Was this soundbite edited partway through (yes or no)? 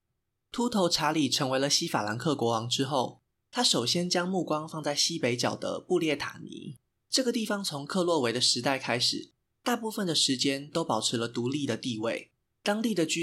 no